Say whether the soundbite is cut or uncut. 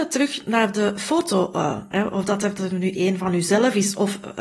cut